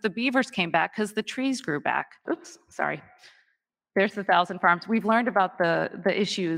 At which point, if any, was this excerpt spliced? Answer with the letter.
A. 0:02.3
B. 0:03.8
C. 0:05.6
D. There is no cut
A